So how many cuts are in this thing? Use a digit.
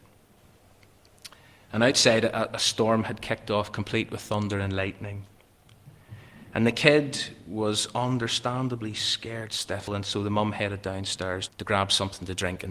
2